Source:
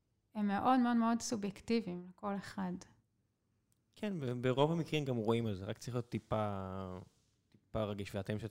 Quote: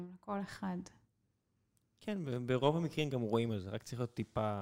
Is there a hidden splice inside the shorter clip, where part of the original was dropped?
no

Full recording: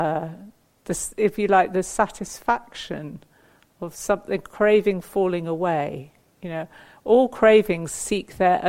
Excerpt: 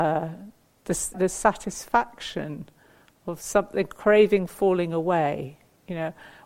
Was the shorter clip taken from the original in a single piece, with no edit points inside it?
no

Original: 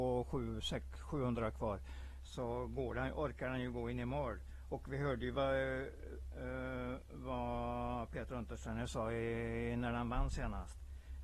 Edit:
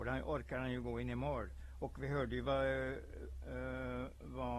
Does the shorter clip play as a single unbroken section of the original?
yes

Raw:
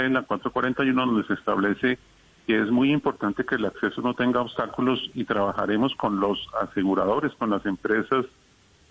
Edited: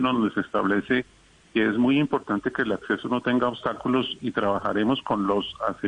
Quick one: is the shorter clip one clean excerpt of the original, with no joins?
yes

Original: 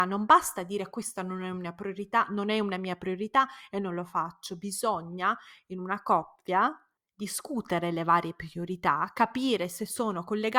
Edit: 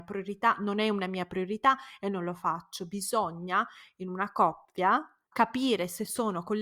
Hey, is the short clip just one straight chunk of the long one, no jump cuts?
no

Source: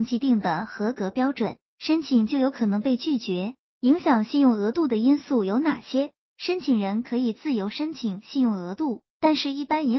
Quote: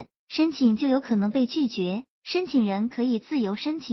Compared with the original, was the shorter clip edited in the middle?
yes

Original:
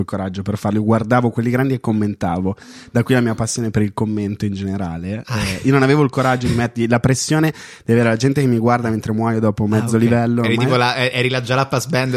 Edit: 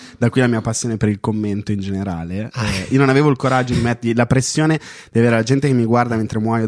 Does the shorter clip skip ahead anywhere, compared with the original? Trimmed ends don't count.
no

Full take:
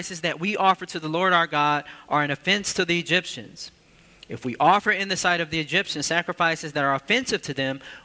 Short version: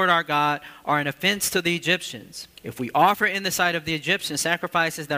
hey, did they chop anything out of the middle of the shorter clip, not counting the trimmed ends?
yes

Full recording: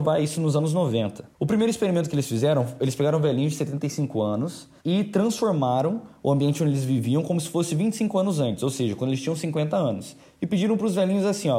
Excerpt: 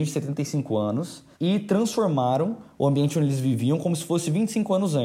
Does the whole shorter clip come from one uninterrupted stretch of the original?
yes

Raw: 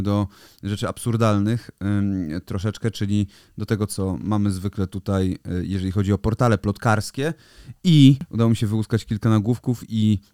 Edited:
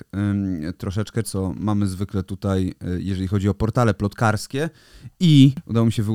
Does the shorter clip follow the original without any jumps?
no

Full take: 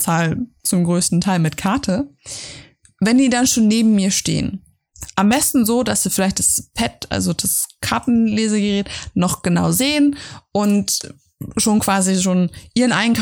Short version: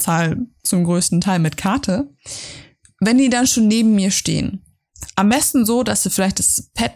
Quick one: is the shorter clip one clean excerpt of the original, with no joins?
yes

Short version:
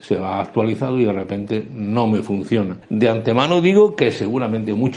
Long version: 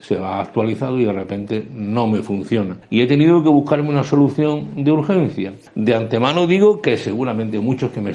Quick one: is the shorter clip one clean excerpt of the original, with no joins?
no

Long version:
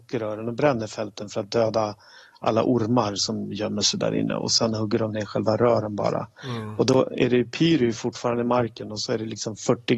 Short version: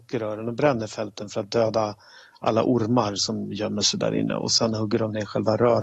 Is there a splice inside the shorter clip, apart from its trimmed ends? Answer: no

